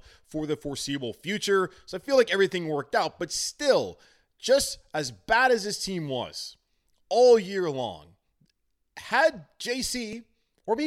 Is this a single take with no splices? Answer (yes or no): yes